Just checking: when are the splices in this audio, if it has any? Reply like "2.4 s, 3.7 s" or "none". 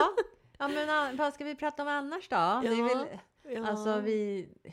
none